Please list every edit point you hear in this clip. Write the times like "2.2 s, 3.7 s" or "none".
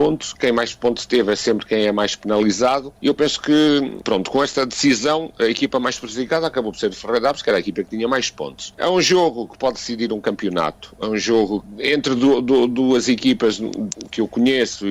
none